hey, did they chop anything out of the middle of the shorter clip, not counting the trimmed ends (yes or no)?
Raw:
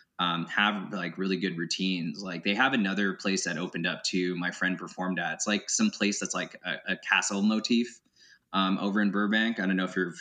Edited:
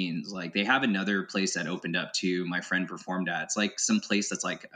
no